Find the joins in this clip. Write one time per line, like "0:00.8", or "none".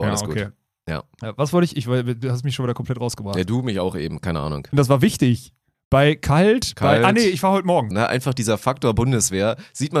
0:04.7
0:07.9